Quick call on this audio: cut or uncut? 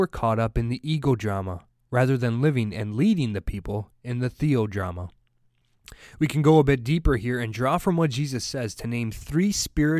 uncut